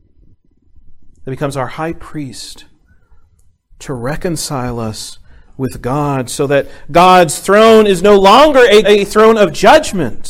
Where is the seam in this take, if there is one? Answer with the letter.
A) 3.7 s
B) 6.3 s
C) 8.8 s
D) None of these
C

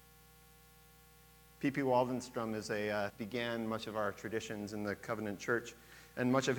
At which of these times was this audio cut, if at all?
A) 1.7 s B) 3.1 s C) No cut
B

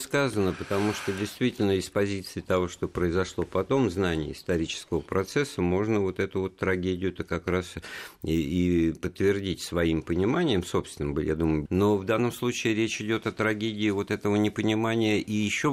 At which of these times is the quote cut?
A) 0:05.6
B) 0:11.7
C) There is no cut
B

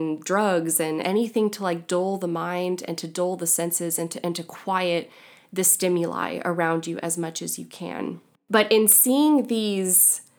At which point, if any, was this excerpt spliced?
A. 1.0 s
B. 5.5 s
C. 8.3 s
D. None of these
A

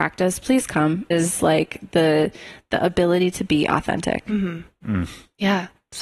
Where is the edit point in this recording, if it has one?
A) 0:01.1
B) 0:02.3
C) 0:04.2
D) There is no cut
A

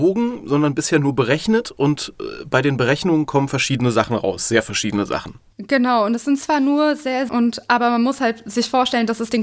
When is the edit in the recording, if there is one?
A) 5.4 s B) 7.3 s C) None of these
B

